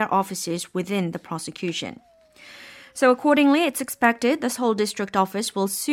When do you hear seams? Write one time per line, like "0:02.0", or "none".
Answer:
none